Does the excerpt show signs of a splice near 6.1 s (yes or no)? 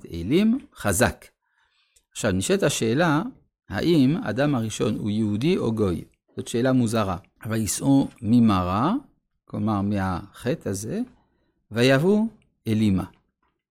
no